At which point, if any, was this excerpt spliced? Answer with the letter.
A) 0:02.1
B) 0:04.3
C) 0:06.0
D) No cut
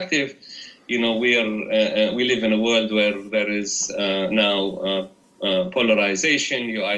D